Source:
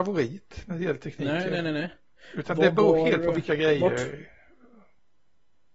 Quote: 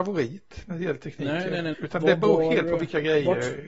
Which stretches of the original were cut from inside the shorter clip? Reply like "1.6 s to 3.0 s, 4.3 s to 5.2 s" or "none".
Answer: 1.7 s to 2.3 s